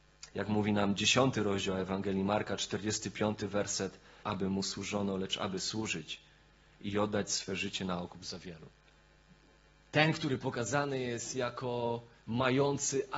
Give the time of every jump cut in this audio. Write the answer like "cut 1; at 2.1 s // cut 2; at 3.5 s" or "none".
cut 1; at 4.2 s